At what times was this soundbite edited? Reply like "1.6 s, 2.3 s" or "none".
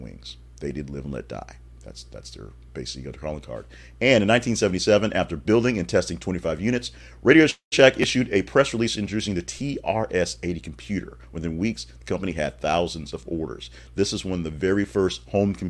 none